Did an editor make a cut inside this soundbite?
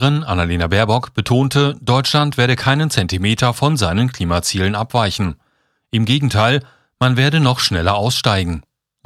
no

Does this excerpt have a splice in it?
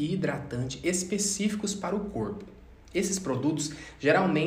no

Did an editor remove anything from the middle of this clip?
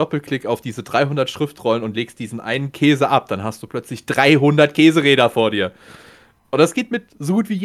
no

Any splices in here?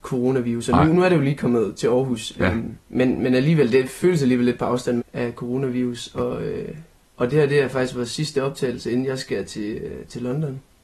yes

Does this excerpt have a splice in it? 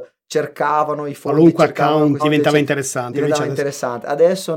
yes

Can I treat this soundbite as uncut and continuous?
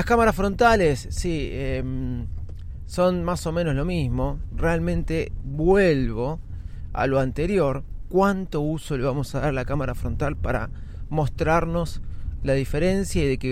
yes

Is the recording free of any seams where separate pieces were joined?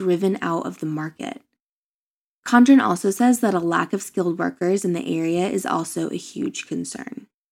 yes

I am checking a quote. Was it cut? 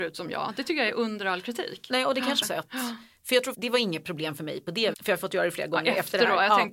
yes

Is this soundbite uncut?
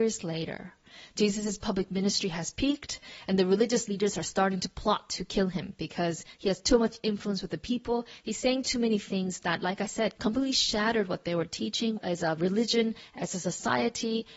no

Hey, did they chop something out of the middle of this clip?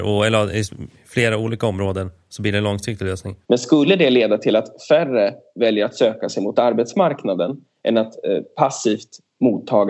yes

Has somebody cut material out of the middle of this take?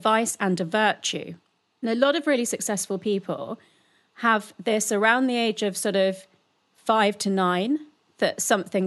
no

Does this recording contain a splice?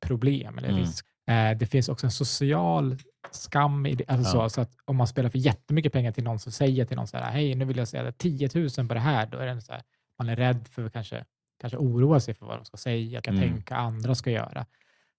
yes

